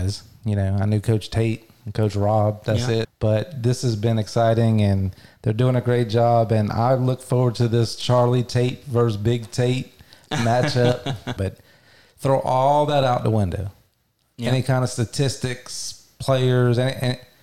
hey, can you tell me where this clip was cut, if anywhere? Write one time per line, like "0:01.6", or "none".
0:03.0
0:11.4